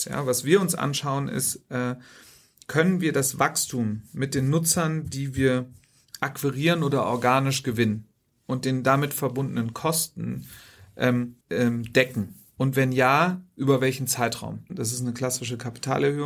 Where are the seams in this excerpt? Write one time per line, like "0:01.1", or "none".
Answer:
0:11.4
0:14.7